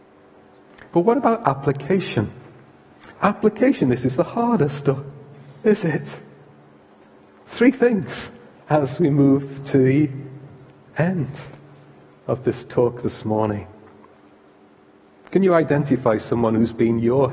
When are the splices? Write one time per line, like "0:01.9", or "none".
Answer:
0:03.1